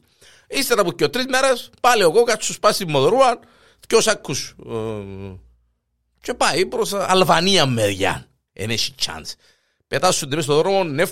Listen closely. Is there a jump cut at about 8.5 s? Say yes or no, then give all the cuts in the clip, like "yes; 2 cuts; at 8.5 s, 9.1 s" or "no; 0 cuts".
yes; 1 cut; at 8.5 s